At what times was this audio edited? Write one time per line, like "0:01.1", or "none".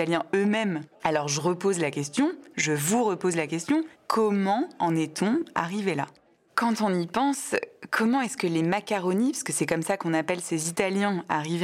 0:00.9

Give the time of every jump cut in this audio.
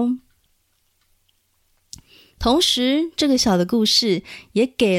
0:03.4

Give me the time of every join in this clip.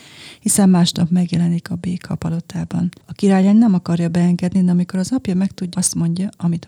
0:03.0
0:05.7

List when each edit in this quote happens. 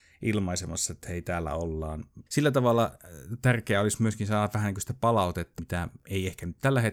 0:02.3
0:05.6

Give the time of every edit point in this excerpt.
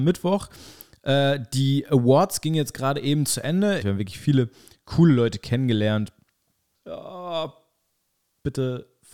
0:03.8
0:06.7

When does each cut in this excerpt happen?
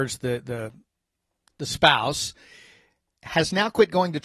none

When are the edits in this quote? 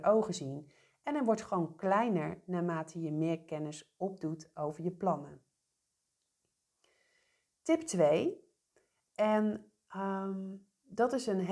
none

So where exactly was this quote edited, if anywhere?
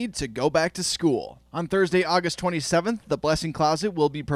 none

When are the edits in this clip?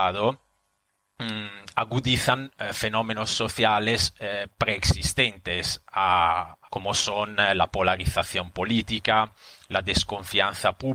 0:06.7

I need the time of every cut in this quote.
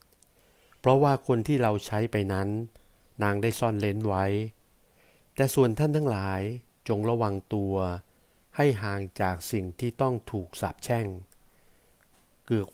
none

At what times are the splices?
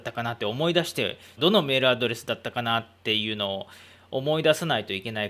0:01.4

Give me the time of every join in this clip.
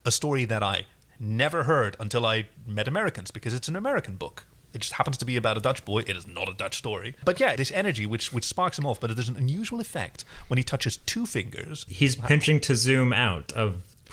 0:07.6

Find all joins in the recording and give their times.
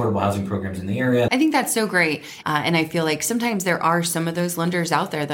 0:01.3
0:02.4

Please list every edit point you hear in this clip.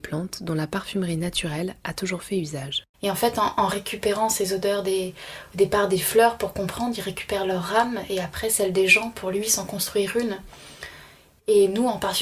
0:02.9

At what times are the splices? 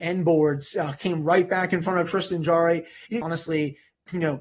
0:03.2

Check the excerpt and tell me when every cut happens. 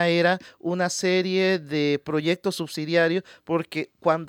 none

